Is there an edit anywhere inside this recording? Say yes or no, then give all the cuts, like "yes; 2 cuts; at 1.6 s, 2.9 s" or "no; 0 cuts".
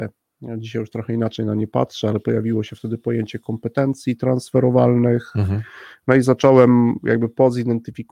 no; 0 cuts